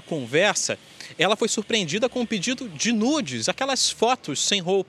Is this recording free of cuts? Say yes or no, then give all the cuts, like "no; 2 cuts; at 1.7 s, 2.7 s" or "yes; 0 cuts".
yes; 0 cuts